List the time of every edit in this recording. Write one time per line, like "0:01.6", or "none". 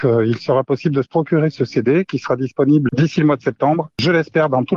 0:02.9